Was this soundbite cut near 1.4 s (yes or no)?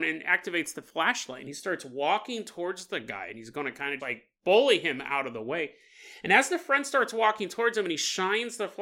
no